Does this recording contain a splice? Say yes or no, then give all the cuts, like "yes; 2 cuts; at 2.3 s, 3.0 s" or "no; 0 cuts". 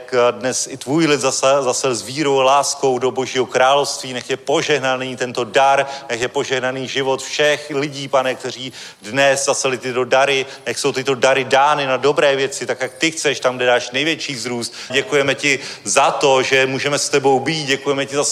yes; 1 cut; at 14.9 s